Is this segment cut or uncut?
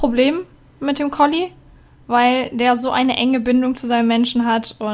uncut